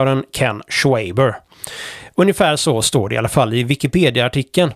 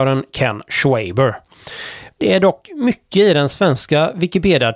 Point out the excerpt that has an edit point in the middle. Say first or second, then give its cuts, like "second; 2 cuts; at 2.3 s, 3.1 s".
second; 1 cut; at 2.1 s